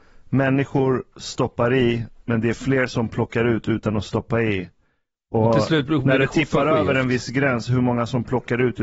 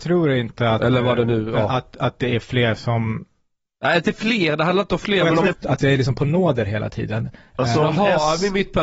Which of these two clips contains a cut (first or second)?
second